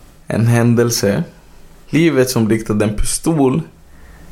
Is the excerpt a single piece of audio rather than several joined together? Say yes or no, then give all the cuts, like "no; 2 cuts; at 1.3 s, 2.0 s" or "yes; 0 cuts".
no; 1 cut; at 1.8 s